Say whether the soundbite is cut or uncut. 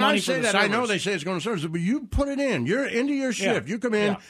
uncut